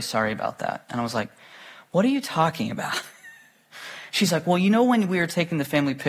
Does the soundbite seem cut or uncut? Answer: uncut